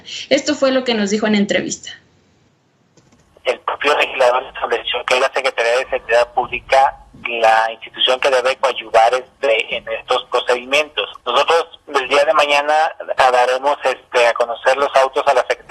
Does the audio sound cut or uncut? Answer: cut